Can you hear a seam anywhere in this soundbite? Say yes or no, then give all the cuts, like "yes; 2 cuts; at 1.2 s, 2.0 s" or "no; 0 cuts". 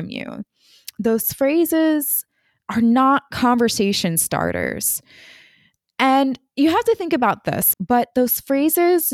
yes; 1 cut; at 7.7 s